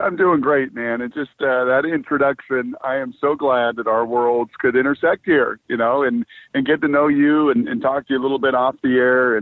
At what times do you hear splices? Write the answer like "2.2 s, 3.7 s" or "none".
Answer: none